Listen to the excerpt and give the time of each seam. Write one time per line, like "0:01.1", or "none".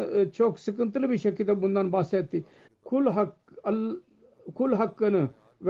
0:02.7